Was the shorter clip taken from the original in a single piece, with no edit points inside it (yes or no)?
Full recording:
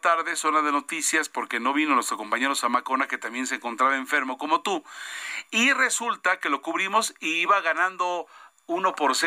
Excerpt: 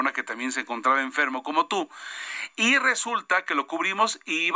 yes